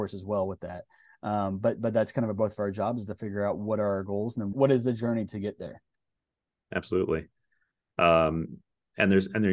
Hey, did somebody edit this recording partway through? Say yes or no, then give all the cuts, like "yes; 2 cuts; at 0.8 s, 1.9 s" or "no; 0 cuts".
yes; 1 cut; at 4.5 s